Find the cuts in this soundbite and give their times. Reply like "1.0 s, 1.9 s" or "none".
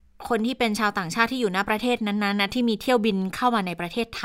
none